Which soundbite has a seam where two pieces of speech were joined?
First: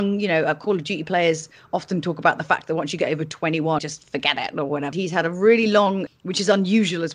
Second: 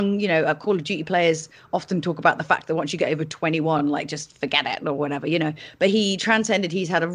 first; 3 cuts; at 3.8 s, 4.9 s, 6.1 s

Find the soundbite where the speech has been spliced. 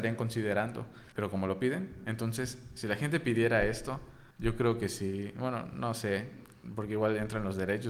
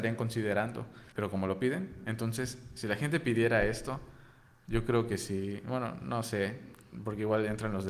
first; 1 cut; at 4.3 s

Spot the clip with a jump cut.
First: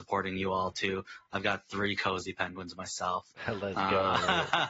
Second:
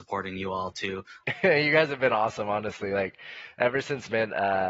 second; 1 cut; at 1.2 s

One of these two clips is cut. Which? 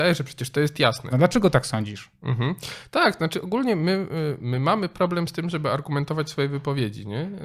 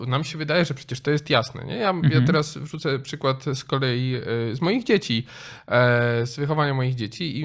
first; 1 cut; at 1.1 s

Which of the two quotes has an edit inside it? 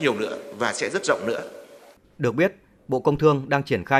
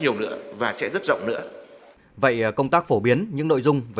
second; 1 cut; at 2.0 s

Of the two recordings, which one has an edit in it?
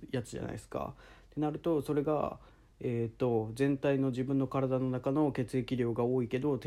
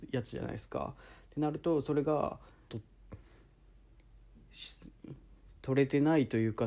second; 1 cut; at 2.7 s

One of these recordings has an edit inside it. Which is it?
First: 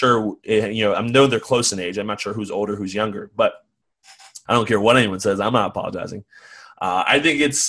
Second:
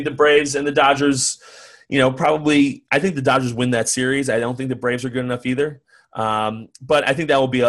first; 1 cut; at 4.5 s

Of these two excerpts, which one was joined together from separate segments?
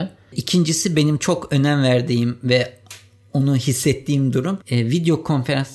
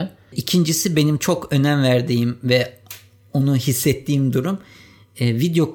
first; 1 cut; at 4.6 s

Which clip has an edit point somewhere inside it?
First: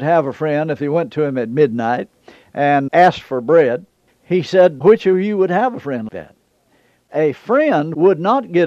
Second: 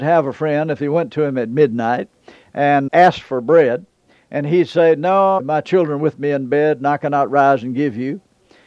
first; 2 cuts; at 4.1 s, 6.1 s

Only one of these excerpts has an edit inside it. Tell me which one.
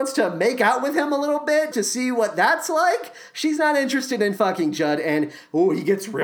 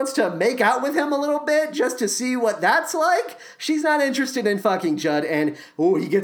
first; 1 cut; at 1.7 s

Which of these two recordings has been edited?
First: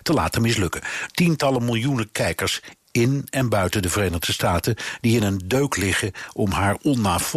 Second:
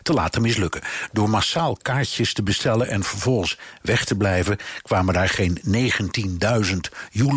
first; 1 cut; at 1.1 s

